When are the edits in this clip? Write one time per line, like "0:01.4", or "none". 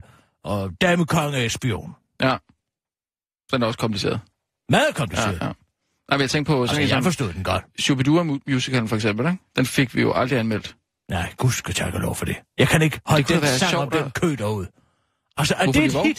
none